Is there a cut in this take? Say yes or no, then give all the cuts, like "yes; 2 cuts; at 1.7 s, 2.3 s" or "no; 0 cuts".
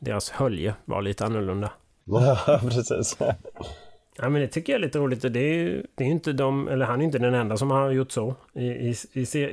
yes; 1 cut; at 2.0 s